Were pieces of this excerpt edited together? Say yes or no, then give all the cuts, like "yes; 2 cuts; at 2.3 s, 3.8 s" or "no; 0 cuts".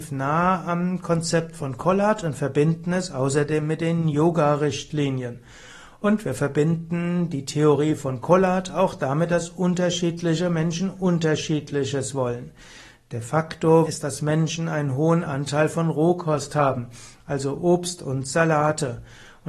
yes; 1 cut; at 13.9 s